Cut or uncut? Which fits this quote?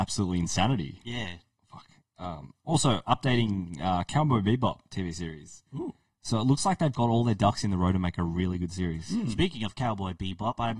cut